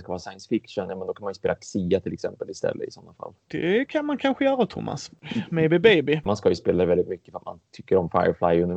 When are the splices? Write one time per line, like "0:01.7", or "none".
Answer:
0:06.3